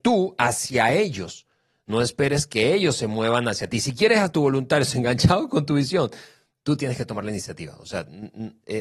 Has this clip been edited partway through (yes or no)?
no